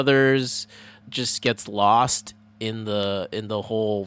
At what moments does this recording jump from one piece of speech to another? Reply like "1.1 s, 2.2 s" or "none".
1.0 s